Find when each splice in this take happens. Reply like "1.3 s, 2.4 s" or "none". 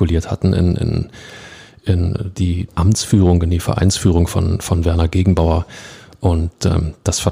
2.7 s